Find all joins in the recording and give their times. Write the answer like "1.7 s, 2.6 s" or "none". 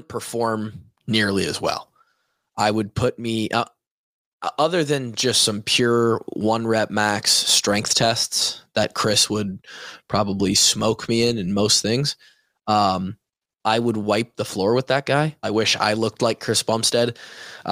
13.5 s, 15.4 s